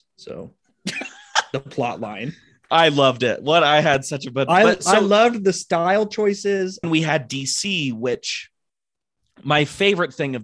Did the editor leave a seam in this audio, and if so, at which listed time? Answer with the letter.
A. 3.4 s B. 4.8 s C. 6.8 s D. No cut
C